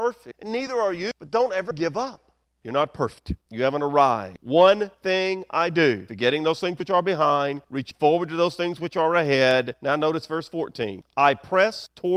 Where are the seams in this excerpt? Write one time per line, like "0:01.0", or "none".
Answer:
0:02.6